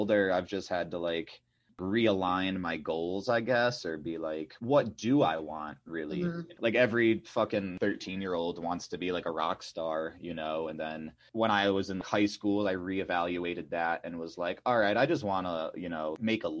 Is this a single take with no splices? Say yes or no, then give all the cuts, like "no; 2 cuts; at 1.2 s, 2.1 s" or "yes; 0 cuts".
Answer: yes; 0 cuts